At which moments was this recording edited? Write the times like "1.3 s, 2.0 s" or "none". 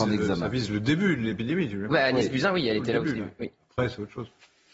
3.4 s